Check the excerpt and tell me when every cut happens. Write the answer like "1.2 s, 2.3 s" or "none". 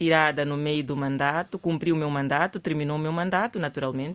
none